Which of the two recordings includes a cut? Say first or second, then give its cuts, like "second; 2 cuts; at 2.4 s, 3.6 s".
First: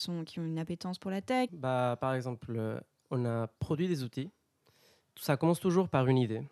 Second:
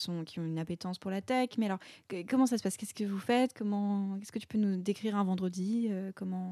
first; 1 cut; at 1.5 s